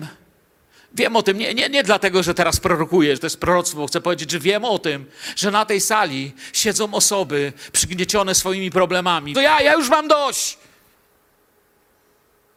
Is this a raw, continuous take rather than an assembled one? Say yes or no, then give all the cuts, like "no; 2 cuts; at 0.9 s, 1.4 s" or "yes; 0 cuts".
no; 2 cuts; at 3.2 s, 9.3 s